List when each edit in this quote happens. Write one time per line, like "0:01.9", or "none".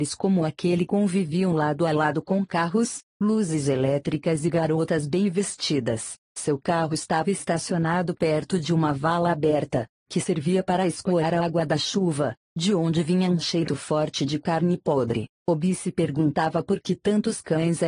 0:13.7
0:15.3